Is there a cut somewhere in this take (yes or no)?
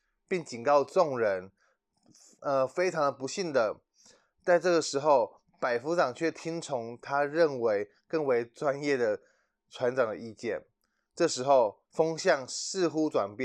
no